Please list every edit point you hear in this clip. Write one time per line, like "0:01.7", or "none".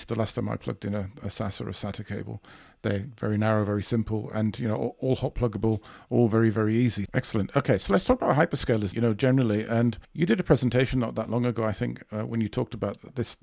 0:07.1
0:08.9
0:10.0